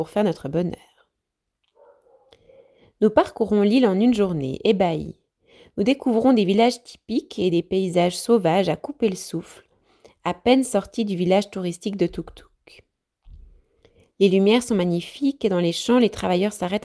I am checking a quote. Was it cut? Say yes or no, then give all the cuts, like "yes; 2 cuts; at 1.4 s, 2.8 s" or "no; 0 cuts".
no; 0 cuts